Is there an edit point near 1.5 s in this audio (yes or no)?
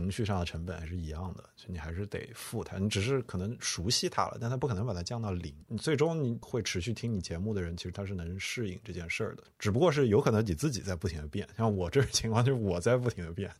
no